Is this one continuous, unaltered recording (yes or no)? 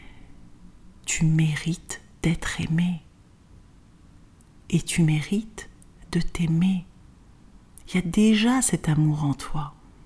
no